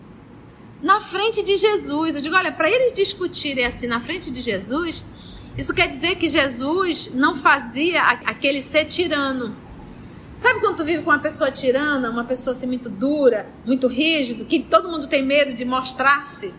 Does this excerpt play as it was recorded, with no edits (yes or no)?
yes